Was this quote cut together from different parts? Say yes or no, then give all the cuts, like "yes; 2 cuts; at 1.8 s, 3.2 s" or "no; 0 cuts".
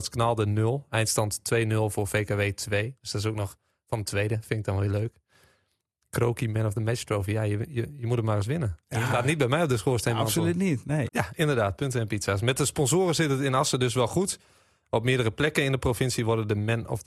yes; 1 cut; at 11.1 s